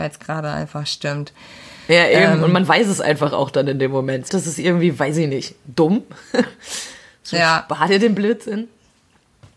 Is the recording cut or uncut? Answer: cut